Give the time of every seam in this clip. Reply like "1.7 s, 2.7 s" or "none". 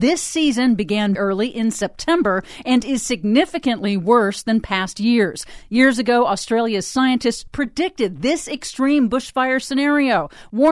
1.2 s

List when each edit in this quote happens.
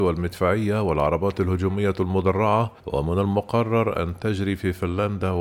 2.8 s

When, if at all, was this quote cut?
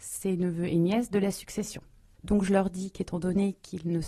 2.1 s

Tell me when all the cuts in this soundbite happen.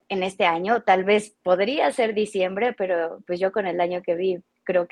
none

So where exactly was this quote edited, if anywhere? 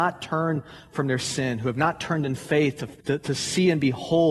3.0 s

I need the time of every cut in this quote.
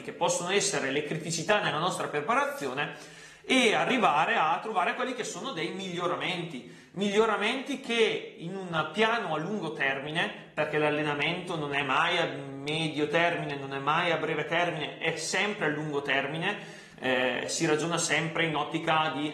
none

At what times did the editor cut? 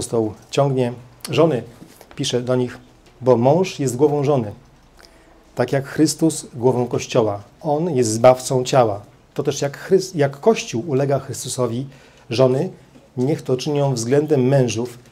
3.0 s

